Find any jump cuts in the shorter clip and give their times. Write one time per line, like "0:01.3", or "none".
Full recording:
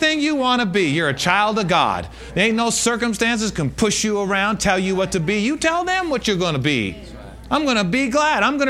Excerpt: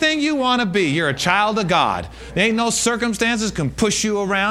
none